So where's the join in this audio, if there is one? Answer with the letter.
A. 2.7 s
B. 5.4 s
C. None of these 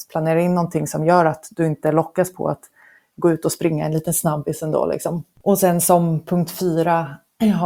B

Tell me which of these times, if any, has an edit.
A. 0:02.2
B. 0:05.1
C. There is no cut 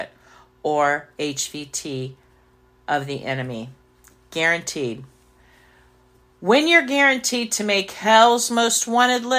C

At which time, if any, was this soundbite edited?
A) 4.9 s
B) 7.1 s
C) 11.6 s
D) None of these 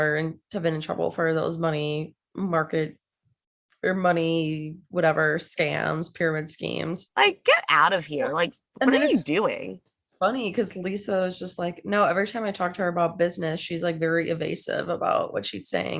B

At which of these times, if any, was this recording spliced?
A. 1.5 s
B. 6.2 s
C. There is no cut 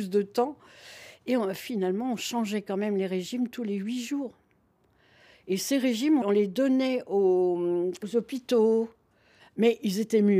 B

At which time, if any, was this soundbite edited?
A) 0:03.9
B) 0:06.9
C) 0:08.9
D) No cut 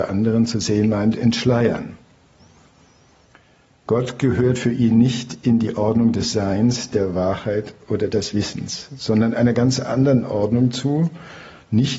A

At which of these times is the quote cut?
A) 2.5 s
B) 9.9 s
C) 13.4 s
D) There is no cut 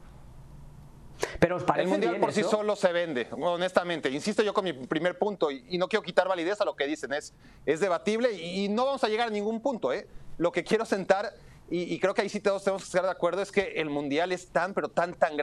D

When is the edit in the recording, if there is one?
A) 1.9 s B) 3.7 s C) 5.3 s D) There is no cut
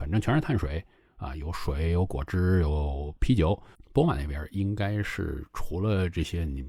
B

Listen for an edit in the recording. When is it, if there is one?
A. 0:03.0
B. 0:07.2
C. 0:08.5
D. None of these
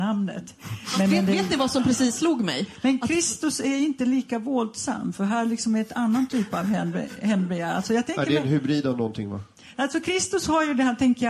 D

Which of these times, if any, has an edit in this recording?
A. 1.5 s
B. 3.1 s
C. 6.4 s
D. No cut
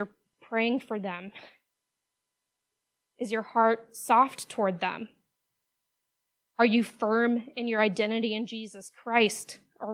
D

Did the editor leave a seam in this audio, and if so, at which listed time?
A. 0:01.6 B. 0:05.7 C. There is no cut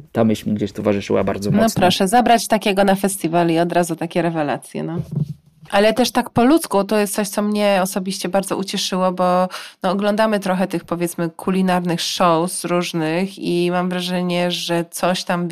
B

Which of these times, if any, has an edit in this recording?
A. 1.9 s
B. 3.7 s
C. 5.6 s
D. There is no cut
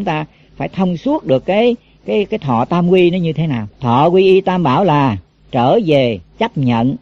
B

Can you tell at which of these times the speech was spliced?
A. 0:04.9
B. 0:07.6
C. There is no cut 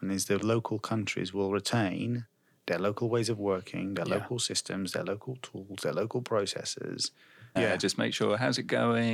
B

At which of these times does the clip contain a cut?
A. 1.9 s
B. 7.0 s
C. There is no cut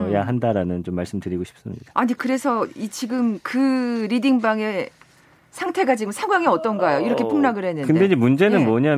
C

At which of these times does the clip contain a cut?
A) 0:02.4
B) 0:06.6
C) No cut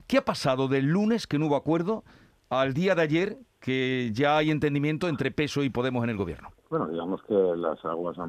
B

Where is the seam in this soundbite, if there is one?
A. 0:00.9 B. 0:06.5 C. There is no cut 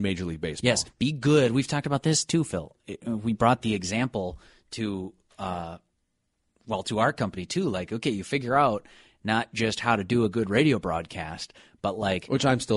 C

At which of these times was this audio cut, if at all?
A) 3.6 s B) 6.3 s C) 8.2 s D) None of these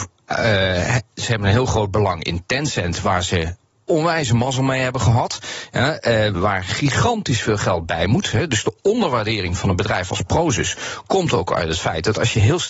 B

